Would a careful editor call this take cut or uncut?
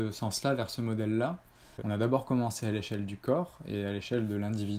cut